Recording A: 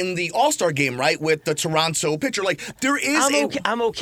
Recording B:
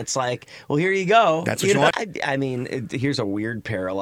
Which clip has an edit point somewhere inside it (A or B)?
B